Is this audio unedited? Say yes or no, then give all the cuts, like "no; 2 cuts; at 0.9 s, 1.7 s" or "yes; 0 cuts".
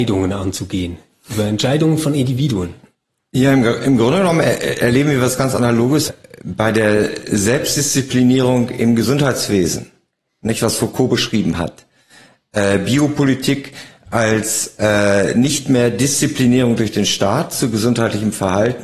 no; 1 cut; at 6.1 s